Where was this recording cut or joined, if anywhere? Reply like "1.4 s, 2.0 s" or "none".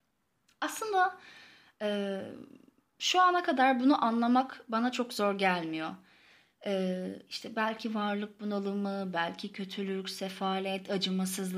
7.3 s